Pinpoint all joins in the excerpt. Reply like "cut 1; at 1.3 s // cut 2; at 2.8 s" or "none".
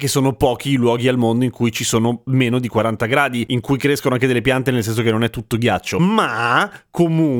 none